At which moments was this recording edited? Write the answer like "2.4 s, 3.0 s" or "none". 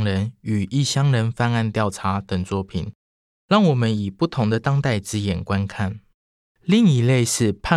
6.5 s